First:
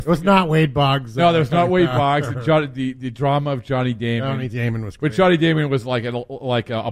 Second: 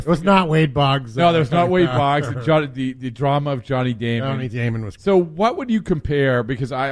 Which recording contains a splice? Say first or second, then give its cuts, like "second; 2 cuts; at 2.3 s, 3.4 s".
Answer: second; 1 cut; at 5.0 s